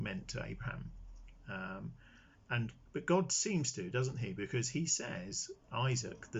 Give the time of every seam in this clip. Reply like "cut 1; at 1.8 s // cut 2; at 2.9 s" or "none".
none